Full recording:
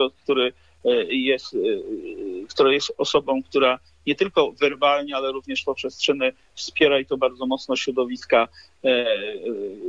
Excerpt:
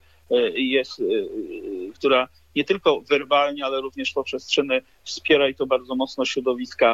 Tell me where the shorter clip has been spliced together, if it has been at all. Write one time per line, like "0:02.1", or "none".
0:01.9